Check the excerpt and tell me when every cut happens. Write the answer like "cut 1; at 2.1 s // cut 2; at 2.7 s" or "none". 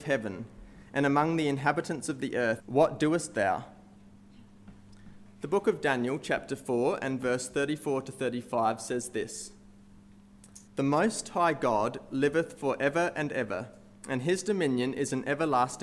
cut 1; at 2.6 s // cut 2; at 5.4 s // cut 3; at 10.7 s